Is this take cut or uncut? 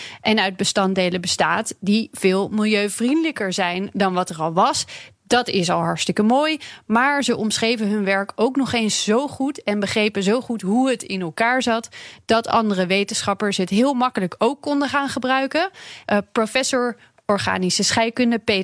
cut